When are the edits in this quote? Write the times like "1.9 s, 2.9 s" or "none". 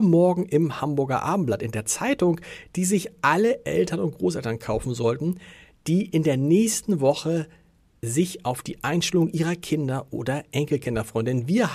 none